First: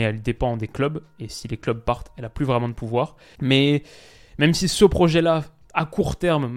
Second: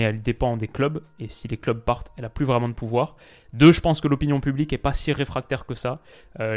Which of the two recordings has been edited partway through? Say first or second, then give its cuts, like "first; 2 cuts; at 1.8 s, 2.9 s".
first; 1 cut; at 3.3 s